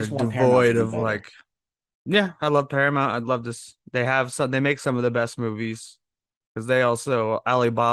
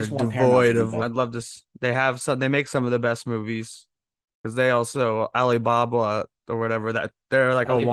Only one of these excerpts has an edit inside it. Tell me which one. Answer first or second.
second